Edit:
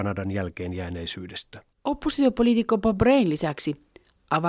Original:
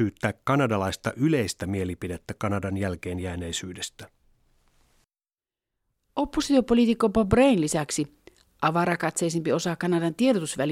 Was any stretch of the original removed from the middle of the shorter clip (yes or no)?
yes